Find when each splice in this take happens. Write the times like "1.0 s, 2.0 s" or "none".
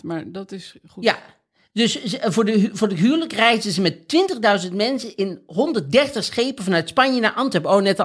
none